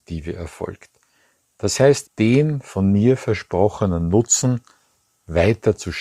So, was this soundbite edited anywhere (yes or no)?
yes